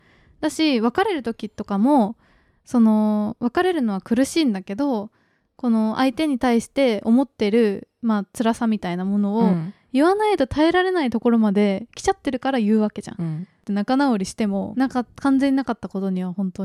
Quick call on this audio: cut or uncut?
cut